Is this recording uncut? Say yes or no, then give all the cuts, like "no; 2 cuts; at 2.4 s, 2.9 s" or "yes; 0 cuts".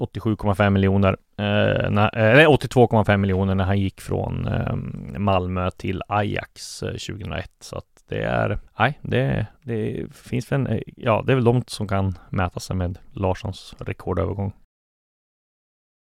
no; 1 cut; at 8.7 s